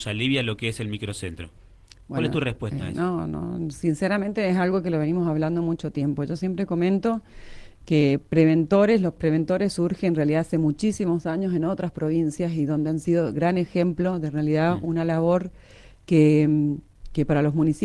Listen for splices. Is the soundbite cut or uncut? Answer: uncut